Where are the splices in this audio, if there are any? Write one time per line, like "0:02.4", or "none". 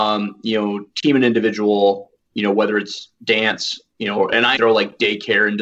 0:04.6